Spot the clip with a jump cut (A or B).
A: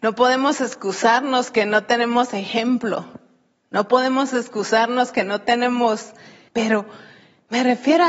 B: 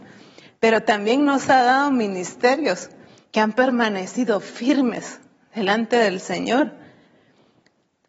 A